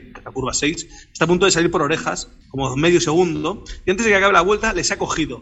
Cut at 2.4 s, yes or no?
yes